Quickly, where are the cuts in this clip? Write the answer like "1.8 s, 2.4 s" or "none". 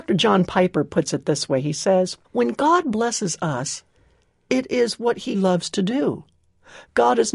2.2 s, 5.3 s